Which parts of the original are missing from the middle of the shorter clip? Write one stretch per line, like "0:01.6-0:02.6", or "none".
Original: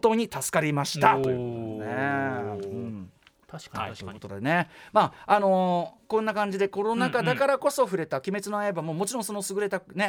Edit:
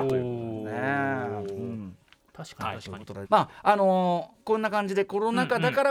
0:04.4-0:04.9